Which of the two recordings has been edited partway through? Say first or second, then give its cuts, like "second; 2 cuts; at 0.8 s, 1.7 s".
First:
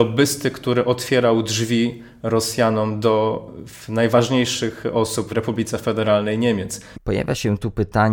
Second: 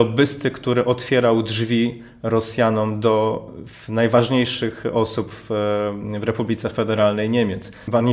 first; 2 cuts; at 5.3 s, 6.9 s